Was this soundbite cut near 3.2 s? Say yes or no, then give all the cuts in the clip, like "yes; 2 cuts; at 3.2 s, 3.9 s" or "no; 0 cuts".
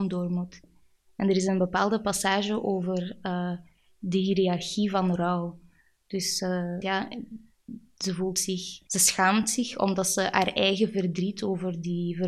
no; 2 cuts; at 6.8 s, 8.9 s